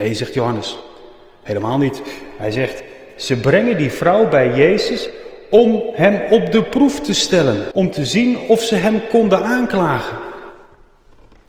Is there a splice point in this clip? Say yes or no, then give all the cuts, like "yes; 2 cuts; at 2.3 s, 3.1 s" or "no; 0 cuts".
yes; 1 cut; at 7.7 s